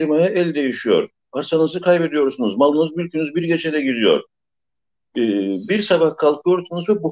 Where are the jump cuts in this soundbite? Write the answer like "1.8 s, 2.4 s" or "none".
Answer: 5.7 s